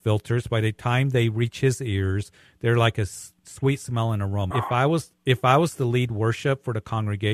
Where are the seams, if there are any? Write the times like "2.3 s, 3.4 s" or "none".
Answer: 4.5 s